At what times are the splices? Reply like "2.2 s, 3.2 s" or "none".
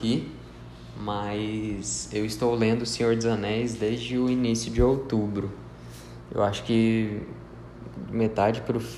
none